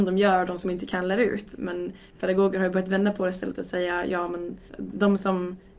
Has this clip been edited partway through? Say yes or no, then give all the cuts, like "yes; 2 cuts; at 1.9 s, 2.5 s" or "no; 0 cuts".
yes; 1 cut; at 4.7 s